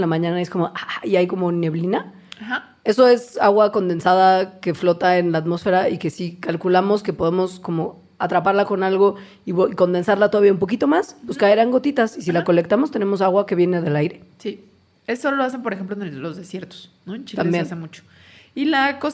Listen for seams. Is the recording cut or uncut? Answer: uncut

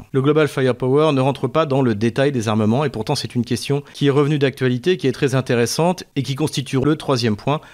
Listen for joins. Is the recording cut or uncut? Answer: uncut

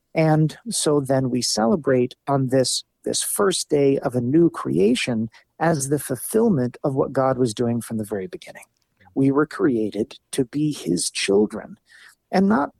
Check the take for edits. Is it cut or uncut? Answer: cut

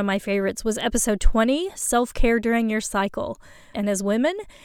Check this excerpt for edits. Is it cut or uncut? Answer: cut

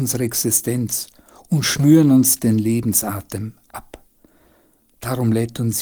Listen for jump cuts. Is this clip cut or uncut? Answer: cut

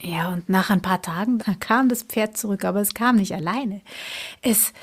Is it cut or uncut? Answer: cut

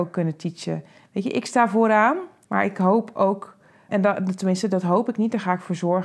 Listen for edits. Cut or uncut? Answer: cut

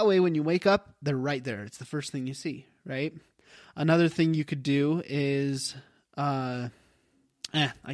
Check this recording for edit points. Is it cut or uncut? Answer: uncut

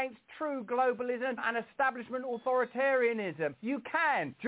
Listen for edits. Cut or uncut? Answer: cut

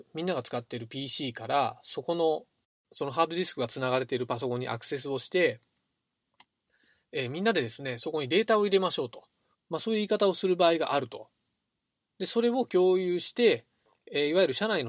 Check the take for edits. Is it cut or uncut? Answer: cut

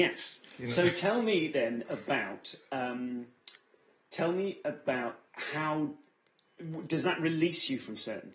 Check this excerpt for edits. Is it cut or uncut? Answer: cut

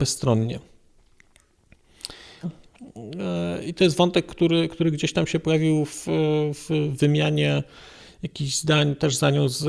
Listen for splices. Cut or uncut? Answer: cut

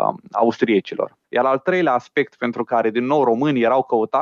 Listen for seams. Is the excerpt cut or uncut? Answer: cut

